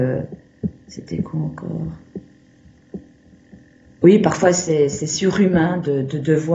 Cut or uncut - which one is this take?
uncut